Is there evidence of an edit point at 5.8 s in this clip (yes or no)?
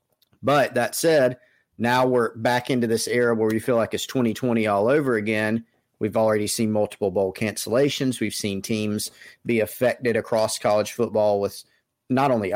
no